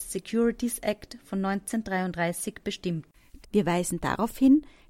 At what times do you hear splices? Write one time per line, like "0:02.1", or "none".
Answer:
0:03.4